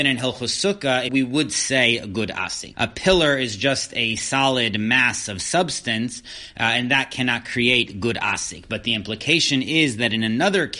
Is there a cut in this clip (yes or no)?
yes